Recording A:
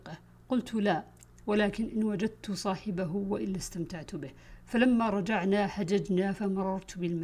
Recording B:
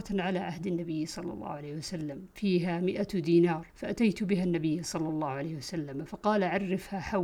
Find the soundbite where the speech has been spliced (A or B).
B